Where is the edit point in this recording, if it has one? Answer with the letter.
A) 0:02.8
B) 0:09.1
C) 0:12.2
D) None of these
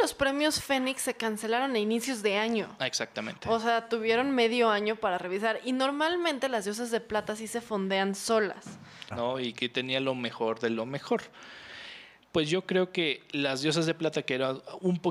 B